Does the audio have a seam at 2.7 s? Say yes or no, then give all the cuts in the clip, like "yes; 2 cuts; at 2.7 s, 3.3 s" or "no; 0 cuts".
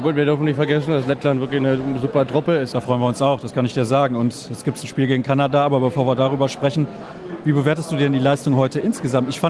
yes; 1 cut; at 2.7 s